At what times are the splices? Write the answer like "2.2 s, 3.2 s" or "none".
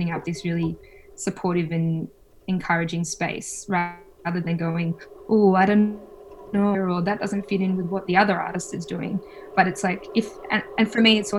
6.7 s